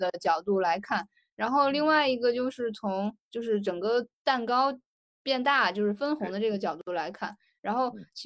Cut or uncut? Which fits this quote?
uncut